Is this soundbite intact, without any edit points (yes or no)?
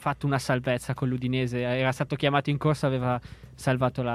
yes